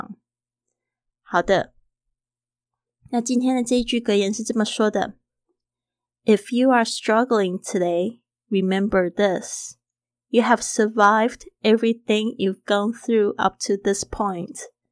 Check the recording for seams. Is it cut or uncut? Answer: uncut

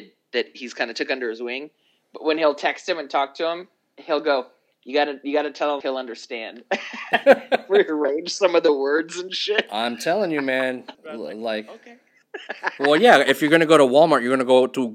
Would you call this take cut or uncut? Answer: cut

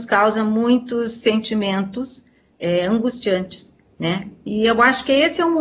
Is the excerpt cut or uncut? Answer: uncut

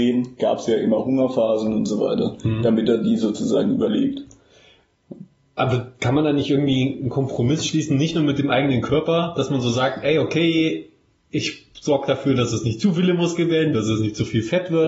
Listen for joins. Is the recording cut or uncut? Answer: cut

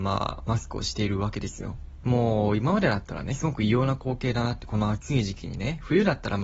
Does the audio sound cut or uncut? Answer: cut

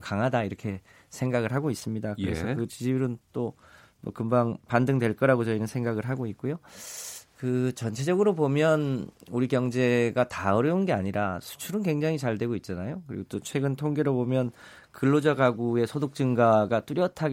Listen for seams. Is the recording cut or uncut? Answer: uncut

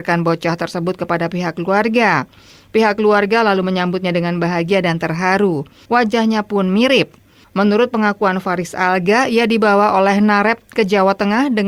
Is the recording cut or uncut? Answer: cut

